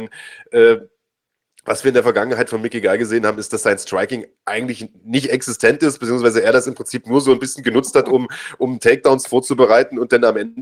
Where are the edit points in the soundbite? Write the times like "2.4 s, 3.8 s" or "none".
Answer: none